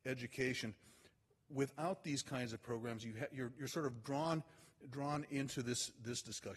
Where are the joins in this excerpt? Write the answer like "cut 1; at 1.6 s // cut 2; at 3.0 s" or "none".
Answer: none